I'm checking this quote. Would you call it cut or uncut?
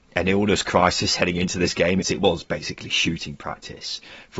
cut